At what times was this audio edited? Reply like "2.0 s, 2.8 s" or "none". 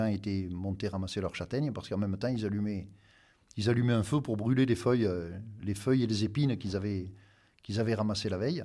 none